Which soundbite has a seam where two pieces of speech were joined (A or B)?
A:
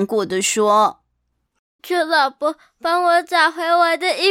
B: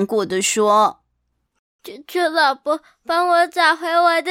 A